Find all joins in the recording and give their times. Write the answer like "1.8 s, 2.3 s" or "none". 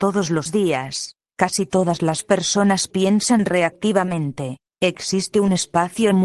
4.7 s

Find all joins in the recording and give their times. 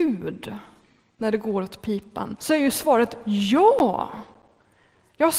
2.4 s

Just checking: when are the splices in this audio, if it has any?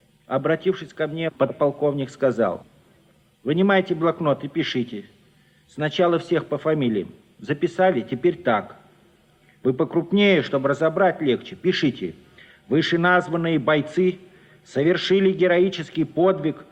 none

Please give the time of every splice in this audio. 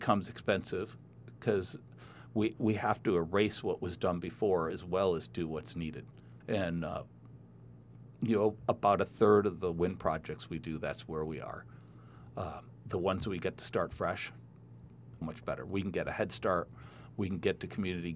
6.4 s, 15.2 s

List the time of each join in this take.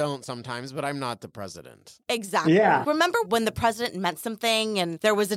2.8 s

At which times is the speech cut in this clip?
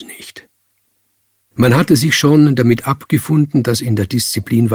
1.5 s

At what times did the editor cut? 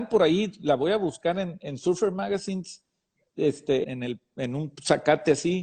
3.8 s

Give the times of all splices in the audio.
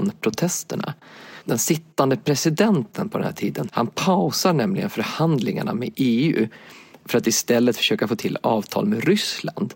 1.4 s, 3.7 s

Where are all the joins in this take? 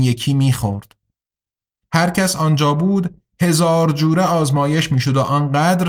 1.8 s

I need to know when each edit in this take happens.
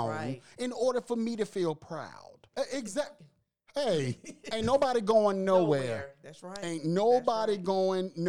2.5 s

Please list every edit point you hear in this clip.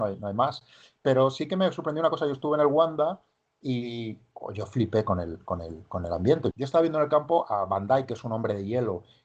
6.5 s

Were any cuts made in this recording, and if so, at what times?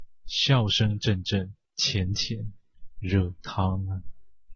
1.6 s

